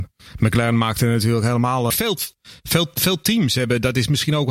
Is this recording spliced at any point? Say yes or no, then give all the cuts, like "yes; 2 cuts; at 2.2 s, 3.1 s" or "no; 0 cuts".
yes; 1 cut; at 1.9 s